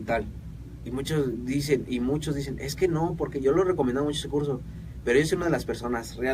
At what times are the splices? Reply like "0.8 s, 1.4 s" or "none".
none